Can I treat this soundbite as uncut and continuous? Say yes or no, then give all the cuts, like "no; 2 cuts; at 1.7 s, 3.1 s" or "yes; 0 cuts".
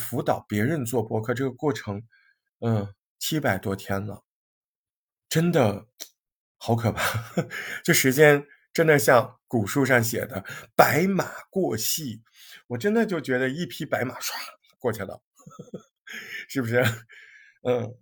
yes; 0 cuts